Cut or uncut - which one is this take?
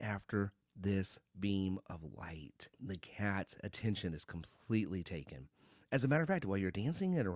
cut